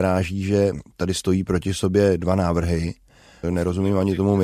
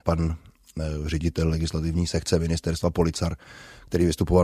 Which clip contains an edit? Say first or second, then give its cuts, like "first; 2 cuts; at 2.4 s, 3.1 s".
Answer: first; 1 cut; at 3.4 s